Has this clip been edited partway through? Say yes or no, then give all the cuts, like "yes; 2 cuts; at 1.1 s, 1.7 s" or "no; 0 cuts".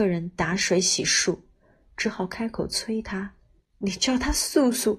yes; 1 cut; at 3.6 s